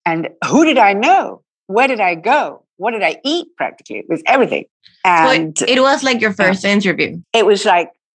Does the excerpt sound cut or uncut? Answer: uncut